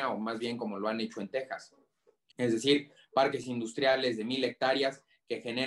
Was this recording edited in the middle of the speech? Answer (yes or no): yes